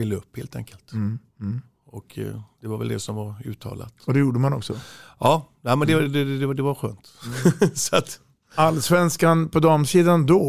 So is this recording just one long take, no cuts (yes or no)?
yes